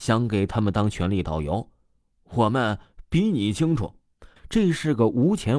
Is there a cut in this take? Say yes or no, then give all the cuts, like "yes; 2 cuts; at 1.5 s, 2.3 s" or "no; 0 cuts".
yes; 1 cut; at 4.4 s